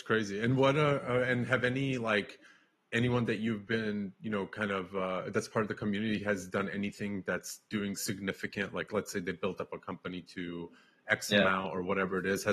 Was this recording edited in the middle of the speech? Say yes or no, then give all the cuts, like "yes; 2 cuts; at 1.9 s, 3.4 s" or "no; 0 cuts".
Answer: no; 0 cuts